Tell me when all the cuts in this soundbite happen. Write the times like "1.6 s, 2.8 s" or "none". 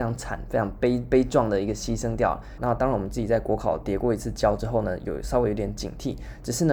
2.6 s

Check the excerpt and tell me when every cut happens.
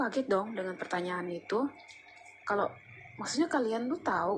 2.4 s

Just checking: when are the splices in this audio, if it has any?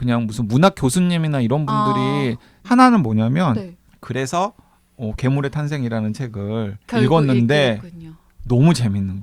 2.6 s, 3.9 s

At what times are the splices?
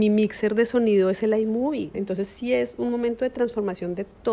1.9 s

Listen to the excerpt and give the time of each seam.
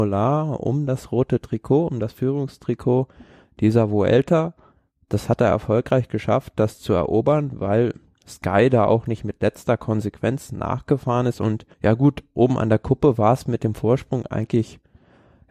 11.7 s

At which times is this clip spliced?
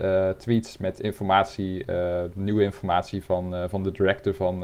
none

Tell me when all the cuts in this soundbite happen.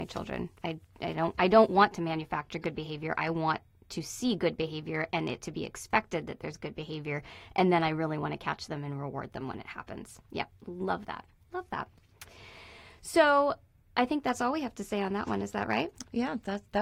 none

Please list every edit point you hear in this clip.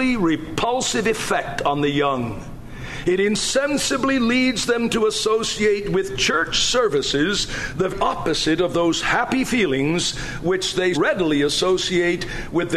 7.9 s, 10.9 s

